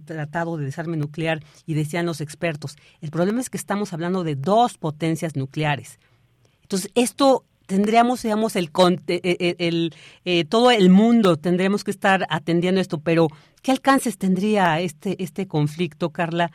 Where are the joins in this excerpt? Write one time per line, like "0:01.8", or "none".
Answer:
none